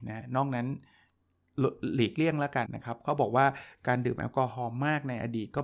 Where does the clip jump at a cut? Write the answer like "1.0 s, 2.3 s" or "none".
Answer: 2.7 s